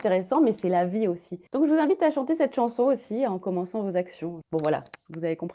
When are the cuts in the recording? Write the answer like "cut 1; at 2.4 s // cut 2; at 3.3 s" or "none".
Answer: cut 1; at 1.5 s // cut 2; at 4.4 s

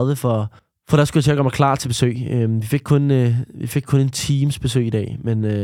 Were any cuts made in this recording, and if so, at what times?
none

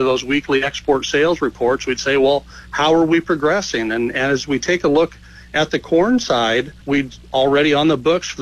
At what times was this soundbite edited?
cut 1; at 6.8 s

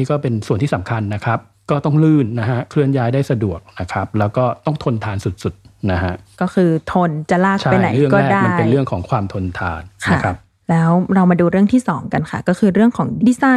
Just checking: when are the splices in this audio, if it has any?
none

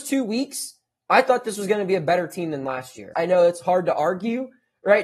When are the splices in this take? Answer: cut 1; at 3.1 s

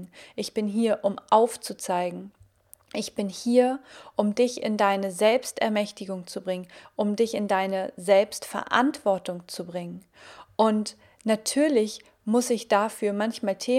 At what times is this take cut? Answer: none

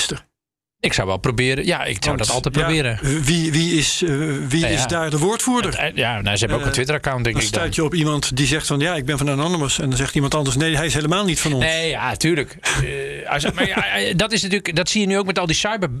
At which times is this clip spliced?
none

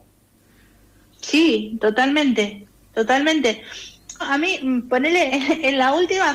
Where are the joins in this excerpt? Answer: cut 1; at 4.2 s // cut 2; at 5.3 s

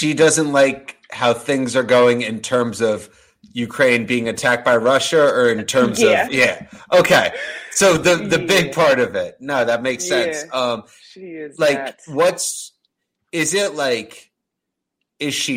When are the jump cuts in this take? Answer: cut 1; at 6.3 s

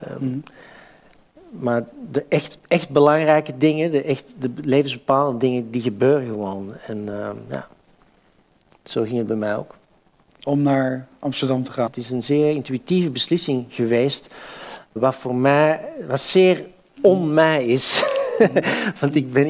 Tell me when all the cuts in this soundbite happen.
cut 1; at 11.9 s // cut 2; at 15.0 s

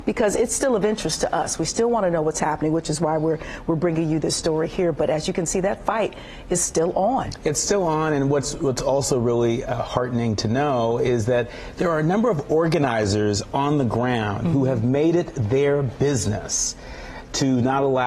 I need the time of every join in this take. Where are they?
none

